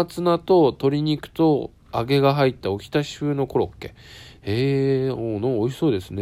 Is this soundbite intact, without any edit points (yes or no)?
yes